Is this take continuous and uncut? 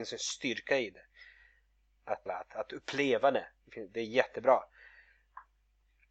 no; 1 cut; at 2.3 s

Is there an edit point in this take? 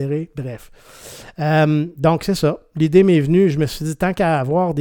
no; 0 cuts

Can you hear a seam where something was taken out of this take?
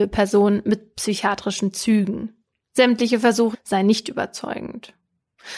yes; 1 cut; at 3.5 s

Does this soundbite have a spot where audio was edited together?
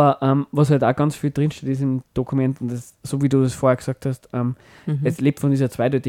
no; 0 cuts

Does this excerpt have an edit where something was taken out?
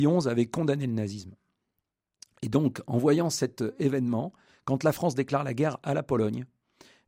no; 0 cuts

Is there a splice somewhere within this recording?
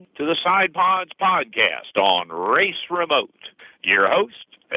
no; 0 cuts

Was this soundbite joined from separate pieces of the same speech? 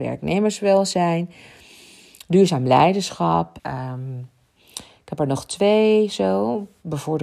yes; 1 cut; at 3.6 s

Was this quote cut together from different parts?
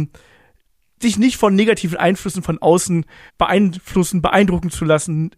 yes; 1 cut; at 3.3 s

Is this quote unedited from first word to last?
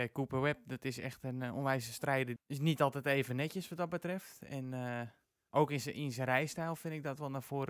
no; 1 cut; at 2.4 s

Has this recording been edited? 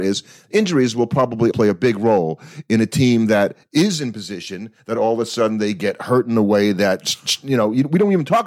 yes; 1 cut; at 1.5 s

